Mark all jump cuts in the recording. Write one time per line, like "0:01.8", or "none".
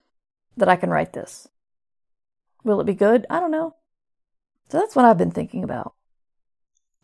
0:04.6